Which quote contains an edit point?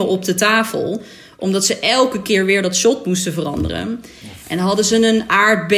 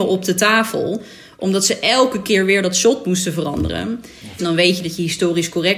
second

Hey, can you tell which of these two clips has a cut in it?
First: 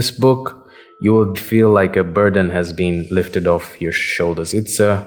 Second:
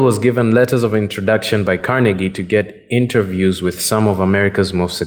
first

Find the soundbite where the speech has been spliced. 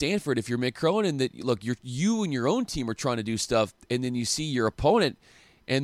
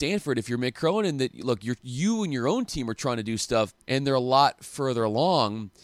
second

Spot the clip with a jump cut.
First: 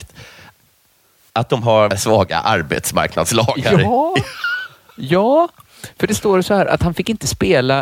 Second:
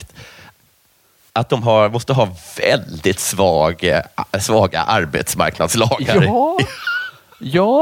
first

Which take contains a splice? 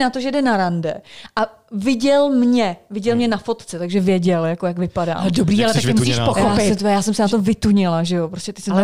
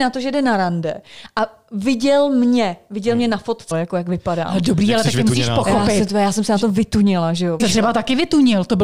second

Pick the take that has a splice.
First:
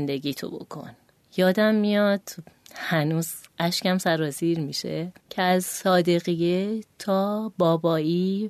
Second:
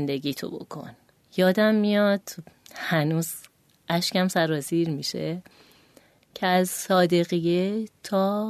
first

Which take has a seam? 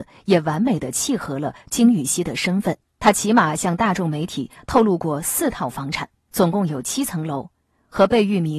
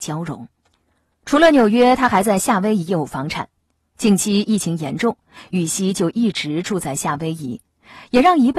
first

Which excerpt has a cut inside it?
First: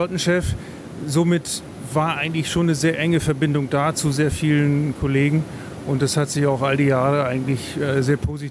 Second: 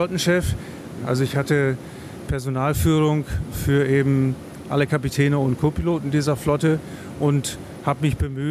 second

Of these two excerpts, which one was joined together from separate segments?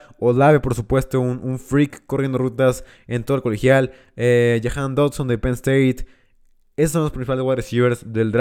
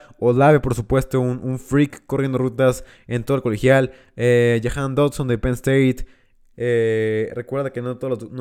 second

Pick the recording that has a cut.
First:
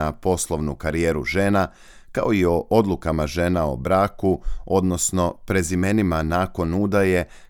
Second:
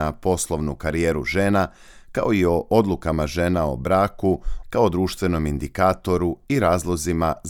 second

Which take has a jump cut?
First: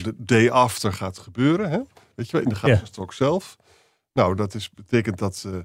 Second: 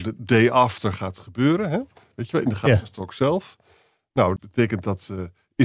second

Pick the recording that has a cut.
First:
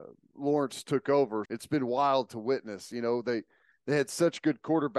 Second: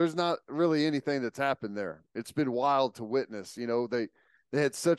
first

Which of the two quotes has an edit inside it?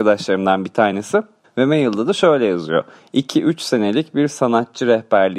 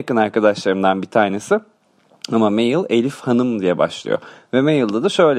first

